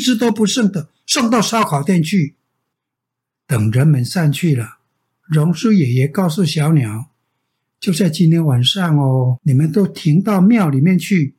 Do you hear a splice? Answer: no; 0 cuts

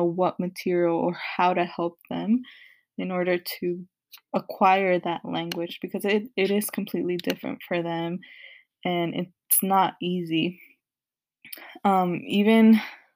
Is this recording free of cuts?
yes; 0 cuts

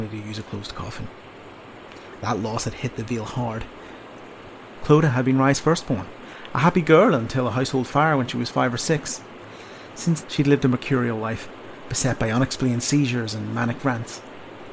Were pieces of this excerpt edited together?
yes; 1 cut; at 10.2 s

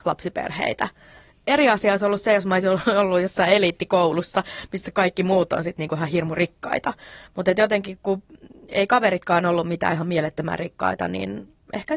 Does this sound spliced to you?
no; 0 cuts

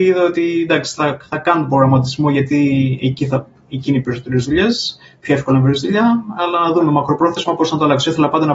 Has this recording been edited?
no; 0 cuts

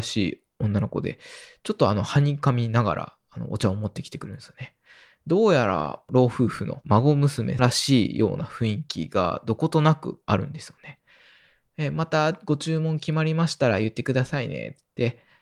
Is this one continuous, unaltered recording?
yes; 0 cuts

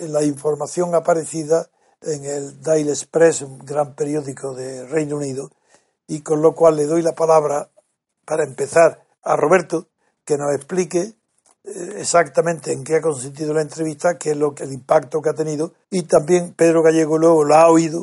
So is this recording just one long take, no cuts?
no; 3 cuts; at 9.1 s, 14.6 s, 15.8 s

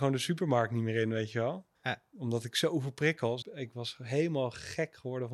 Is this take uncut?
no; 2 cuts; at 1.8 s, 3.4 s

